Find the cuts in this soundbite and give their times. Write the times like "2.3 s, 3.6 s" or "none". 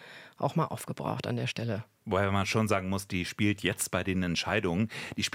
3.1 s